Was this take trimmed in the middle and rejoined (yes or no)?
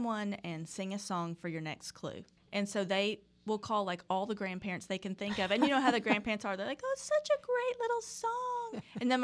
yes